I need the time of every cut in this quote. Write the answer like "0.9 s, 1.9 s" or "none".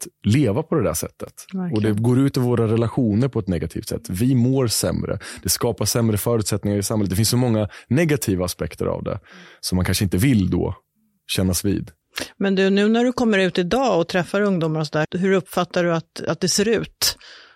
15.0 s

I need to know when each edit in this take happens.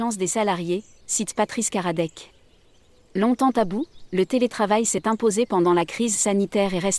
1.0 s

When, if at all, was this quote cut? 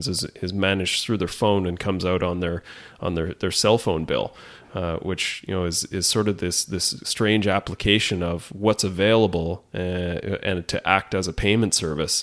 7.0 s

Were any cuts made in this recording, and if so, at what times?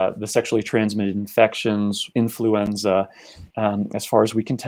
2.1 s, 3.5 s

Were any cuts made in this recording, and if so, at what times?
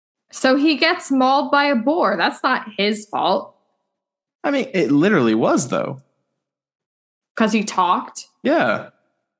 none

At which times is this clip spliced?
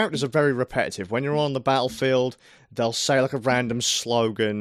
none

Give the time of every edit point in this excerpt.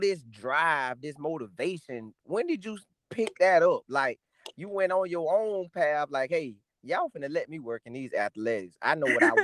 none

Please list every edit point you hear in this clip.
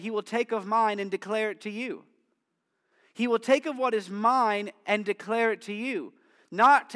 none

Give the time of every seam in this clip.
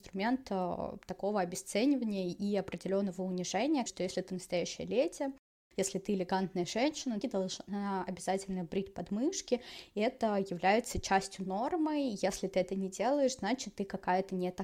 3.9 s, 7.2 s

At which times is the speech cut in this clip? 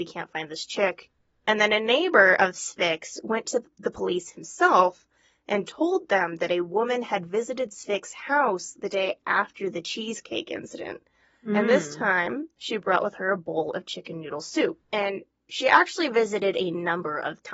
14.8 s

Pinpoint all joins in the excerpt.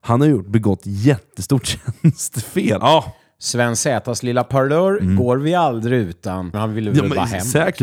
2.8 s, 6.5 s

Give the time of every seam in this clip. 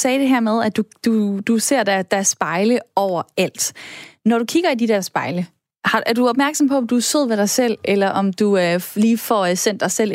none

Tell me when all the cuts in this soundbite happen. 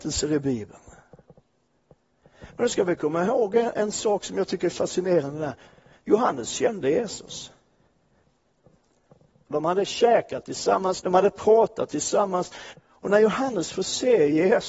9.5 s, 11.0 s, 12.7 s

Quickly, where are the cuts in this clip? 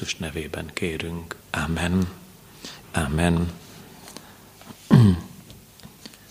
1.4 s, 2.8 s

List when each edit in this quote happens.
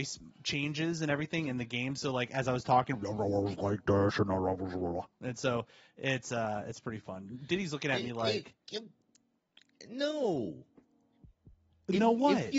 none

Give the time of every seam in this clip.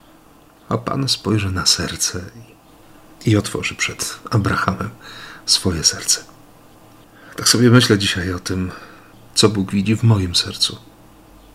none

